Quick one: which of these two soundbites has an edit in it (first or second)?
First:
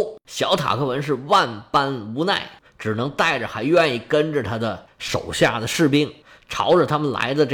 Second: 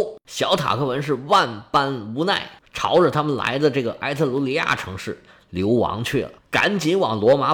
second